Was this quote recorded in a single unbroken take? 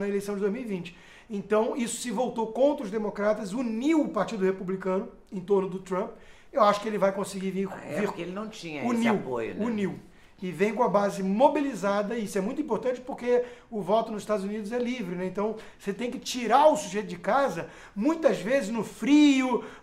yes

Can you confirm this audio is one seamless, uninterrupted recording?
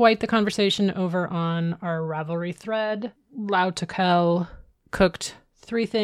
yes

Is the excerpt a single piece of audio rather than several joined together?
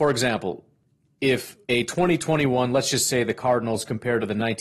no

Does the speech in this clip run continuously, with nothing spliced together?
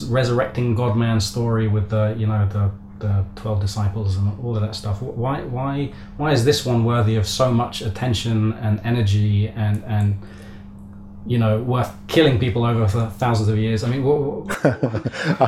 yes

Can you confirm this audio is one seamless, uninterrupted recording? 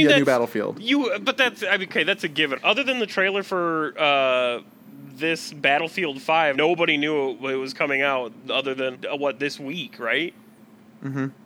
no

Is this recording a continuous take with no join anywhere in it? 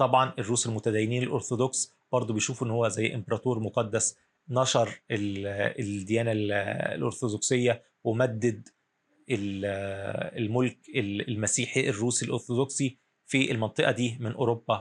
yes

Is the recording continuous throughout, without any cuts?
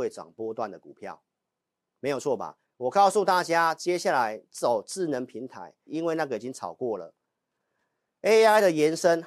no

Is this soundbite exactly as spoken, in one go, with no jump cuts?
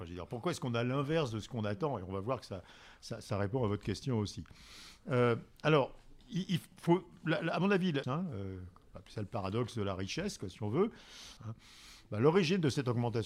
no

